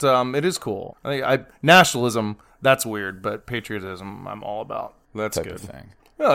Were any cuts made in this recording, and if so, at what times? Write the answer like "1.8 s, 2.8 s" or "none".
0.9 s, 5.0 s

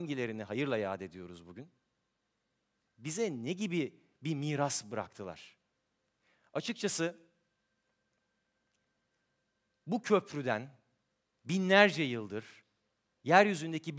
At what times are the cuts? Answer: 2.9 s

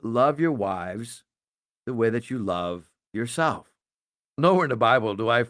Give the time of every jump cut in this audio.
none

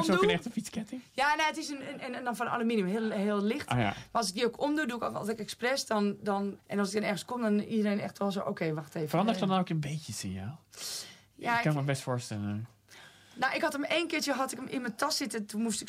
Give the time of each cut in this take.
6.6 s

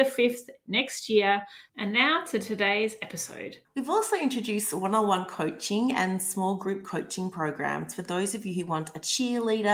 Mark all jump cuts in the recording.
1.7 s, 3.7 s

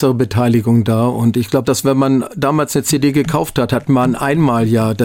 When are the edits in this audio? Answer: 1.6 s

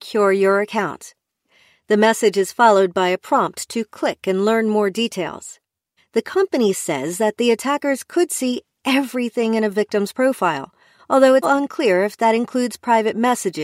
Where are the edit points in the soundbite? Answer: 6.0 s, 11.4 s

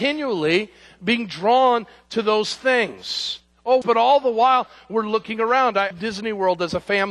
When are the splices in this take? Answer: 3.8 s, 5.9 s

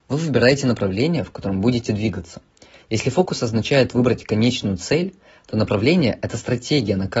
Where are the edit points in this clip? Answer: none

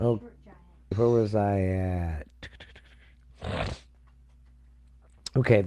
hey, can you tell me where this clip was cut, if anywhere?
0.9 s

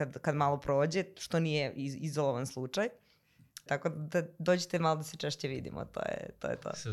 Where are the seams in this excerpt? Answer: 3.7 s

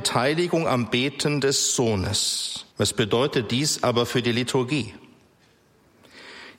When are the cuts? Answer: 2.7 s

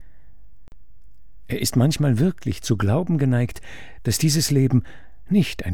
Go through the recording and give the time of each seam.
none

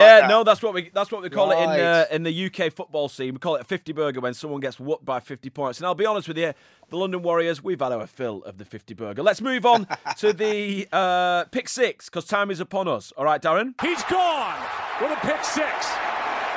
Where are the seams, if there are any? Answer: none

